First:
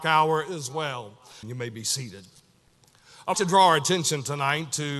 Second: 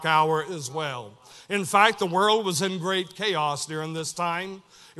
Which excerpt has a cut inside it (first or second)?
first